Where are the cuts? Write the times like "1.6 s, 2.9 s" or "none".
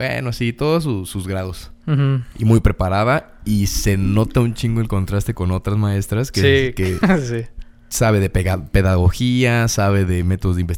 none